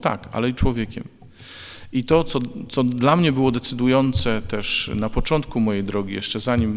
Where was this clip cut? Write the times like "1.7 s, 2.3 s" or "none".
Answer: none